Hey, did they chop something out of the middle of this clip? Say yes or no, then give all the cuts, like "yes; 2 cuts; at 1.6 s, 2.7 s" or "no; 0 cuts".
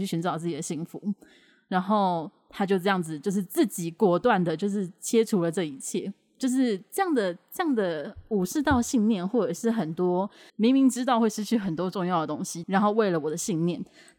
yes; 2 cuts; at 10.5 s, 12.6 s